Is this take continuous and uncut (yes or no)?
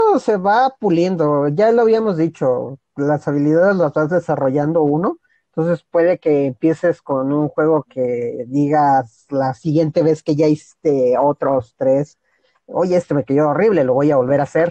yes